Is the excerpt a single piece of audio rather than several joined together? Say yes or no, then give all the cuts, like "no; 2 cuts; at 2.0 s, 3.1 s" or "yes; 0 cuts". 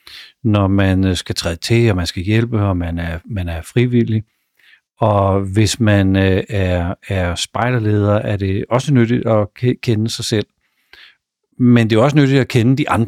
yes; 0 cuts